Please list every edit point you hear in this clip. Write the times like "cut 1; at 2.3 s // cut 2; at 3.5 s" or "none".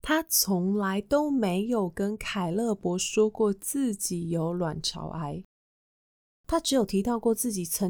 none